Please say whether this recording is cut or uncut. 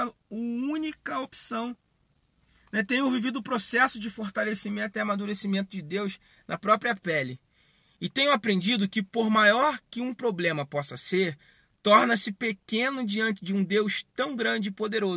uncut